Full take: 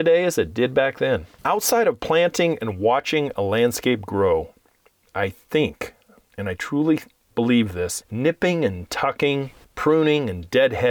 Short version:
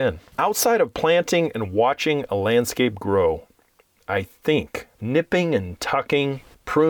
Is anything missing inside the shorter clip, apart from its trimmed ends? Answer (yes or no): yes